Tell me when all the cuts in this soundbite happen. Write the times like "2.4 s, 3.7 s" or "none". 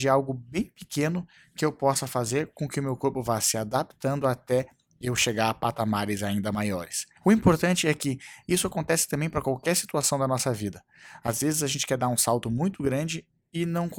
7.2 s